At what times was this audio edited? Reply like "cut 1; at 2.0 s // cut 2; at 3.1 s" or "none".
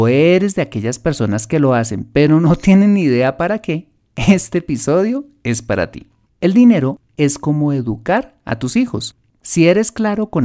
cut 1; at 6.3 s